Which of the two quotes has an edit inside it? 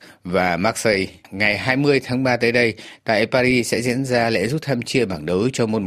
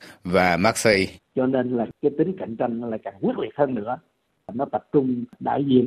second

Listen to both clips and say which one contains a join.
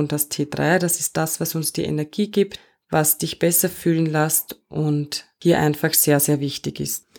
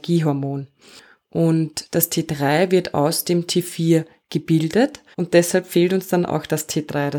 second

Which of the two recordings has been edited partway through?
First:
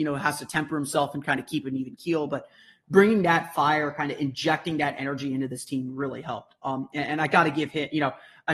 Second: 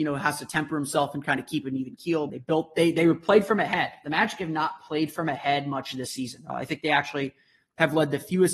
second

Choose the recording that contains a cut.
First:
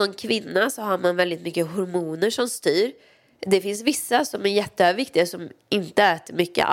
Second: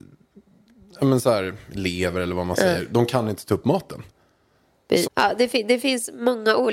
second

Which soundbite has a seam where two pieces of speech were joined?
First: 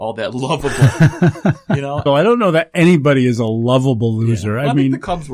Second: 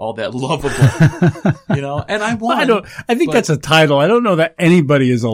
first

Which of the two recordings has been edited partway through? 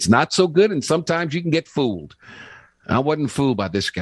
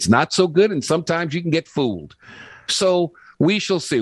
second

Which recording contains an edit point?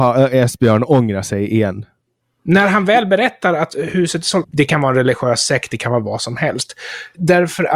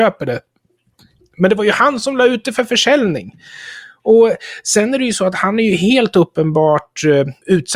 first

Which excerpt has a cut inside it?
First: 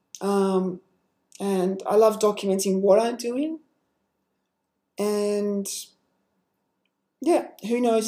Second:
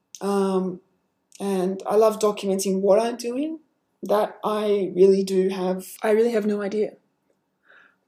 second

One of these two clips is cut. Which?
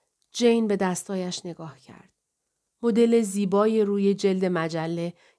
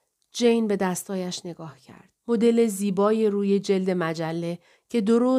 second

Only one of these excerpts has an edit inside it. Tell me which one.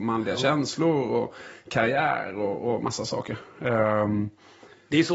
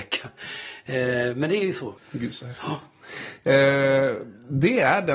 second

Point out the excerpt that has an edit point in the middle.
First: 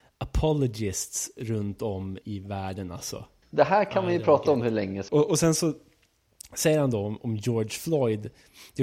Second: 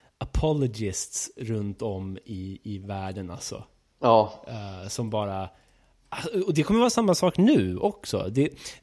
first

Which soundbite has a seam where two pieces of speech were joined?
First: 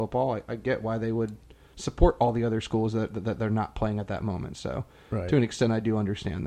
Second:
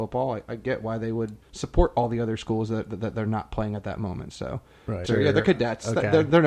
second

